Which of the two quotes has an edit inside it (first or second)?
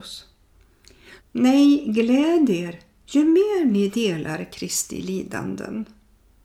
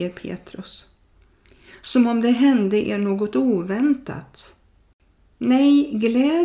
first